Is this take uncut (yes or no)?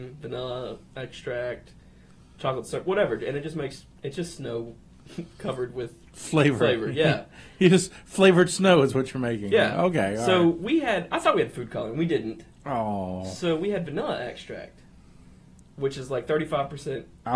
yes